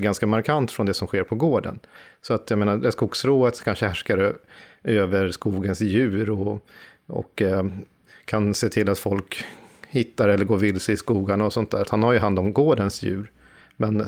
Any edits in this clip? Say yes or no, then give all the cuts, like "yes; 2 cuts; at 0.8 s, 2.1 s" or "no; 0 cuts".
yes; 1 cut; at 11.8 s